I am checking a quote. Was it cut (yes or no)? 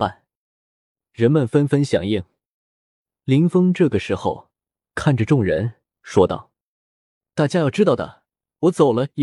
yes